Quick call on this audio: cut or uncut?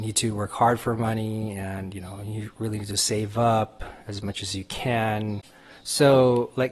uncut